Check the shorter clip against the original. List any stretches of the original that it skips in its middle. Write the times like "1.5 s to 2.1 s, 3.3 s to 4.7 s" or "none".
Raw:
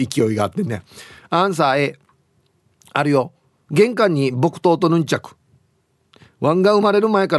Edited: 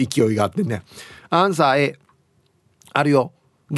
none